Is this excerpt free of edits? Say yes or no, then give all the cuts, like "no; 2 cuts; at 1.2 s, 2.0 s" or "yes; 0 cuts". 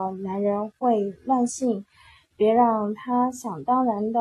yes; 0 cuts